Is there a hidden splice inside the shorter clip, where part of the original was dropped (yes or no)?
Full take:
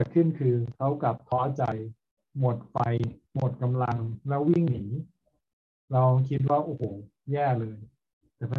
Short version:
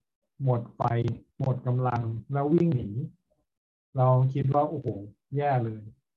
no